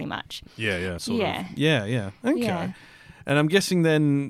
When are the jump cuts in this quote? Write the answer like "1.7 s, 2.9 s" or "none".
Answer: 1.0 s

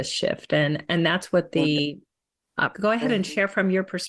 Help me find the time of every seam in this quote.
2.7 s

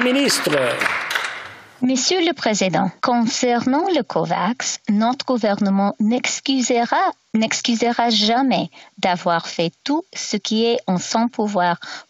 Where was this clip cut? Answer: 3.0 s

